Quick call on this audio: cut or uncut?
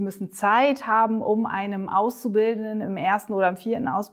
uncut